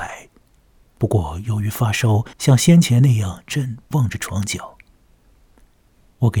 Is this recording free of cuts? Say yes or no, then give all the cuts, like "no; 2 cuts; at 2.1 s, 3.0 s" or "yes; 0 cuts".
no; 2 cuts; at 2.3 s, 3.5 s